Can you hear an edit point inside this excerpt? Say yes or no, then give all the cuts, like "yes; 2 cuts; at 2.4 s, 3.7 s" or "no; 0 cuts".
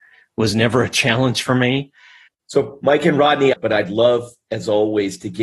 yes; 2 cuts; at 2.3 s, 3.6 s